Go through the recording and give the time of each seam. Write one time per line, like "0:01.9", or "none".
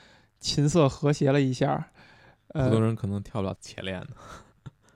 0:03.5